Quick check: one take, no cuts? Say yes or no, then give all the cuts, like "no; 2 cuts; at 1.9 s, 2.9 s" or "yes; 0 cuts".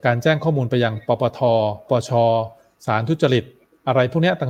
no; 1 cut; at 1.9 s